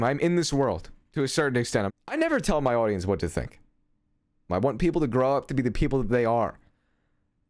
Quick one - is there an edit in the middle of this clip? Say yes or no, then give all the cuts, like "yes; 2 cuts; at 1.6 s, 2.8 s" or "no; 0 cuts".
yes; 2 cuts; at 1.9 s, 4.5 s